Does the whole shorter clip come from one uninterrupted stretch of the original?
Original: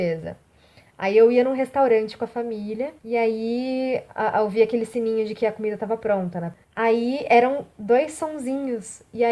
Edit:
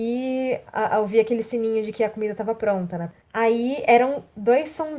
yes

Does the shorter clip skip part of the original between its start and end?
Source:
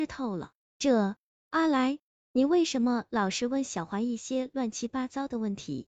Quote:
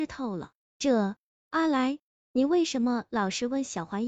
no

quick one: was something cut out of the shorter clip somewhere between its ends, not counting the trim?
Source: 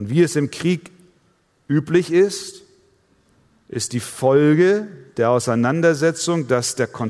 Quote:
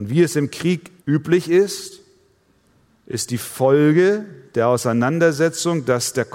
yes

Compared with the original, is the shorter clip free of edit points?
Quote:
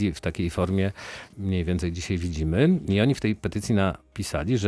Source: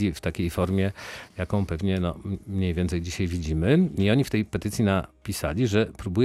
no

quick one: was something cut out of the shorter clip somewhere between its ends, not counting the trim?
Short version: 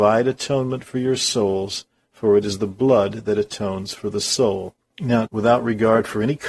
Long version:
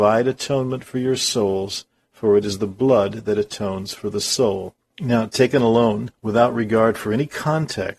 yes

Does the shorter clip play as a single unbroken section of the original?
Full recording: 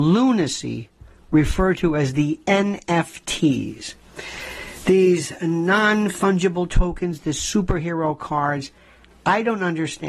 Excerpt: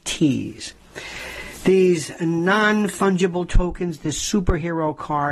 yes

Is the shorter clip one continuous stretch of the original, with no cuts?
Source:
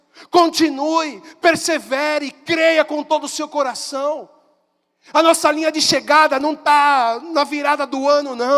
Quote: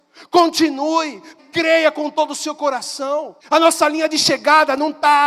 no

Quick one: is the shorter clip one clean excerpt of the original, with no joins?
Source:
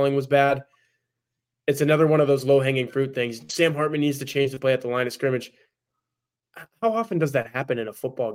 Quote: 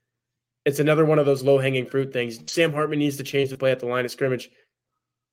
yes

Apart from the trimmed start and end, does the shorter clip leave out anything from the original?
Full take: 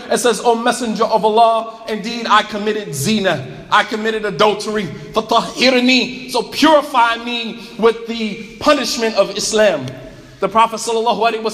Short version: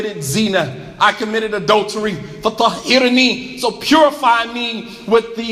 no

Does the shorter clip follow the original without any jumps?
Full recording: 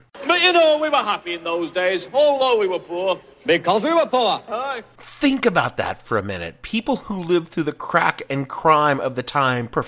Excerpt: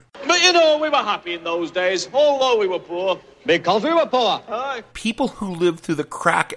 no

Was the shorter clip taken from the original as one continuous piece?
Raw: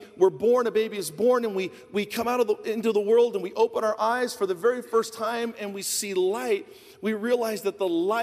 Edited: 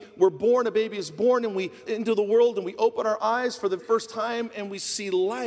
no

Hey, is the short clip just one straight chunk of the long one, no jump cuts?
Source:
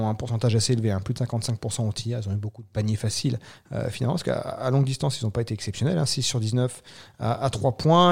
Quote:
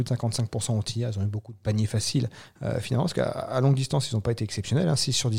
yes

